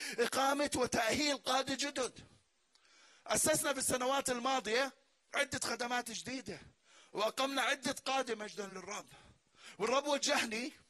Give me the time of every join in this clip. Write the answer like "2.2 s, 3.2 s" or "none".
none